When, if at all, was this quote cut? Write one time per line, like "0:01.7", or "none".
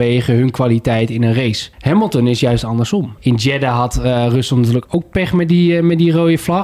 0:01.7
0:03.2